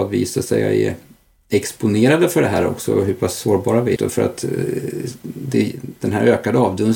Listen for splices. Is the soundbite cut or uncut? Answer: cut